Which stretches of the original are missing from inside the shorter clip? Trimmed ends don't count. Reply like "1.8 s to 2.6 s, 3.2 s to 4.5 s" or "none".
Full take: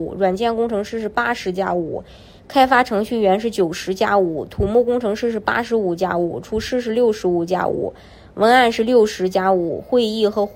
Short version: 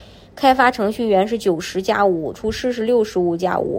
4.5 s to 6.4 s